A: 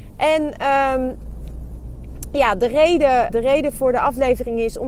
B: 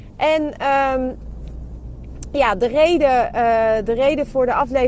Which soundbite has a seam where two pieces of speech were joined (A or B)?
A